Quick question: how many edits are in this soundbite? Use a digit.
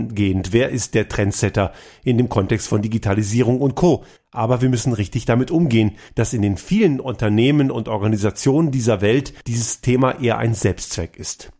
3